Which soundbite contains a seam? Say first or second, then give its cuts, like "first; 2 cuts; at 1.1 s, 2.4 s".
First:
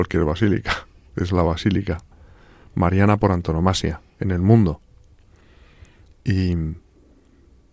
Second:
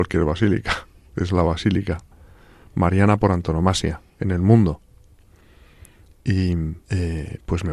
second; 1 cut; at 6.8 s